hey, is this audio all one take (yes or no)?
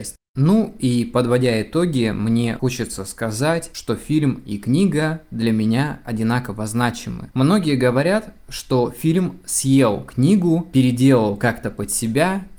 yes